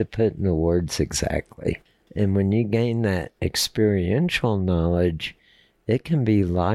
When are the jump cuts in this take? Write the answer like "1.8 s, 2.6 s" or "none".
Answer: 2.1 s